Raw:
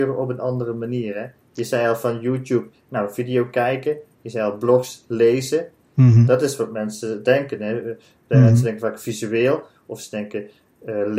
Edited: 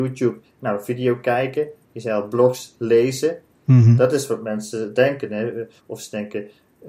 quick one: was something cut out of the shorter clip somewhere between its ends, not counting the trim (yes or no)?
yes